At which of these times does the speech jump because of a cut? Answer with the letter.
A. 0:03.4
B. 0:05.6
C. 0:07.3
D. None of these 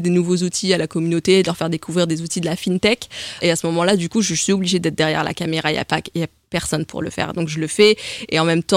A